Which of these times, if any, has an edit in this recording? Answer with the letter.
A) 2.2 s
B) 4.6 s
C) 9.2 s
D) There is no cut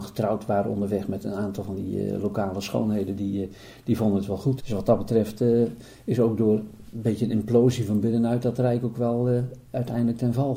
B